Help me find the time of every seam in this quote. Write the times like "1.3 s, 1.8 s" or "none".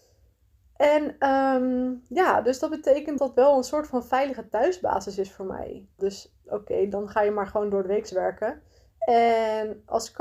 3.2 s, 6.0 s, 8.9 s